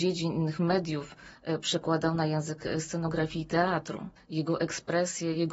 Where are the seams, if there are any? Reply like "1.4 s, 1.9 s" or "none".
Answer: 4.2 s